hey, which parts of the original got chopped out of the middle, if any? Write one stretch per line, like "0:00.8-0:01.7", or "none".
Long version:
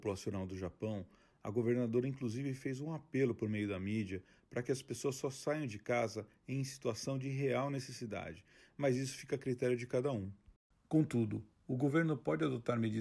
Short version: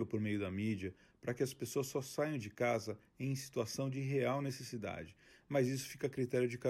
none

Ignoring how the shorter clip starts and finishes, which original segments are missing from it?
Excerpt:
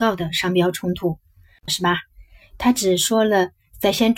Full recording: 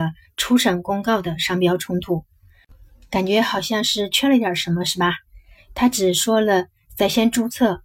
0:02.7-0:04.8

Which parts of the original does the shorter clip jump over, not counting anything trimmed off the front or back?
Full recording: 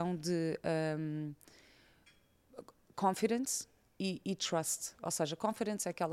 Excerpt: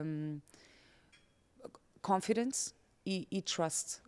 none

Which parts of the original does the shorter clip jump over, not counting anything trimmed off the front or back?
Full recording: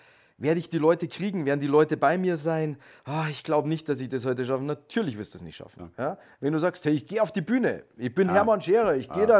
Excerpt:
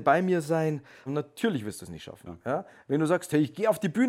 0:03.0-0:04.6

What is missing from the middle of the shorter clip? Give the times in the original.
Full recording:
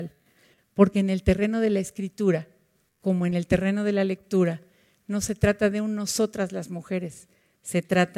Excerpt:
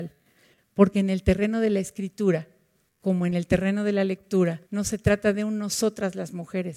0:04.7-0:05.0

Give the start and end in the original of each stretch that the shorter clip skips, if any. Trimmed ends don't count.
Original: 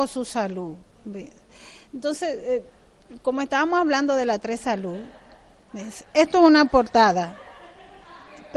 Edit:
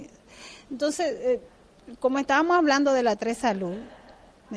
none

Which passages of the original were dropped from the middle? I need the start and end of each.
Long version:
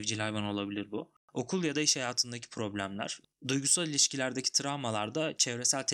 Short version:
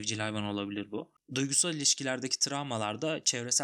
0:01.2-0:03.3

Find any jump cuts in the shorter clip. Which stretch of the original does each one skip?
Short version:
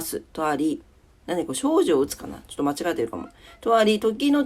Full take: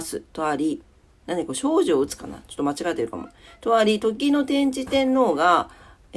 none

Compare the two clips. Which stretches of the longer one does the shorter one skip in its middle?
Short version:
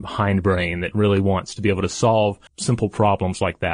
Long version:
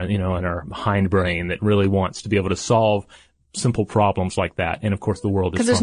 0:03.1-0:03.4

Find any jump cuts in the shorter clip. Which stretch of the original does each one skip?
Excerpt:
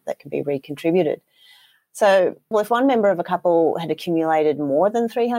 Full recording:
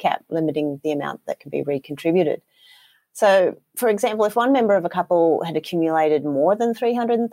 0:03.7-0:04.2

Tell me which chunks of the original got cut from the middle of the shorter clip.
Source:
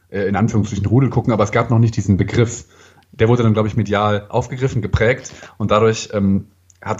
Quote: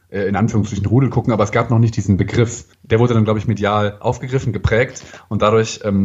0:02.7-0:03.0

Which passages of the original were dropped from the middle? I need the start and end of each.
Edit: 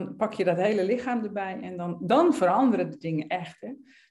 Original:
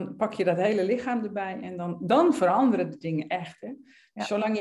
none

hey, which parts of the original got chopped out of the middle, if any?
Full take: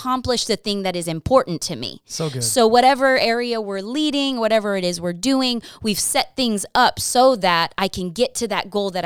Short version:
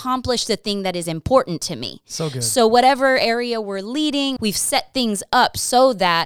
0:04.4-0:05.8

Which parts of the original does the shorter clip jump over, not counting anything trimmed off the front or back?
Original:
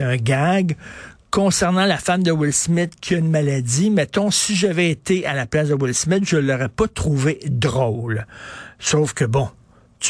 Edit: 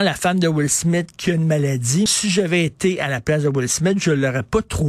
0:03.9-0:04.3

